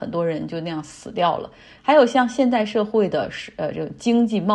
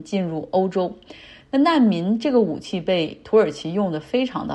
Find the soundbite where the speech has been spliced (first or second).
first